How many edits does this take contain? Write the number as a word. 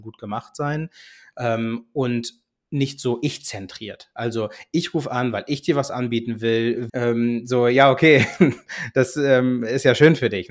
one